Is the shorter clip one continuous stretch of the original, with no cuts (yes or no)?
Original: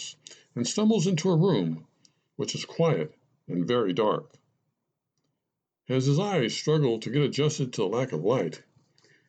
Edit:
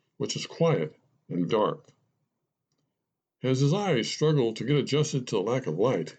no